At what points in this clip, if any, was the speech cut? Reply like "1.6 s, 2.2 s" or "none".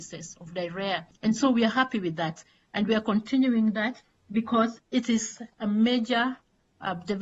1.2 s